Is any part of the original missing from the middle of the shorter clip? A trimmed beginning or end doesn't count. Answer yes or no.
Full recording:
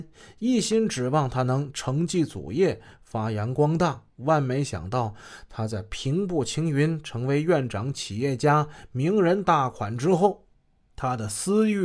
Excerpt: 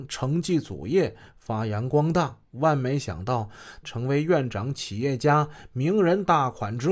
yes